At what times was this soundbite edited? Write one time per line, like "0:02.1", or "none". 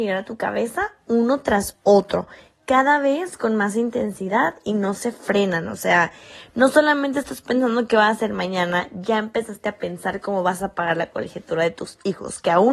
none